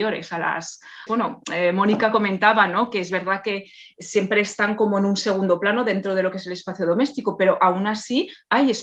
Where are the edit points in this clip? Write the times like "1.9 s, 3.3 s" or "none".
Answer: 1.1 s